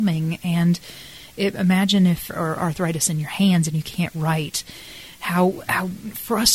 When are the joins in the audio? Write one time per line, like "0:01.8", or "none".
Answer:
0:02.3